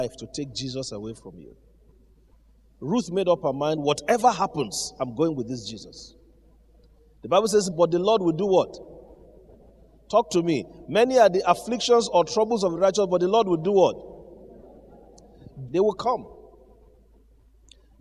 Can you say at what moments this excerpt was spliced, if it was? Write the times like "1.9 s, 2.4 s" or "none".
7.7 s, 15.7 s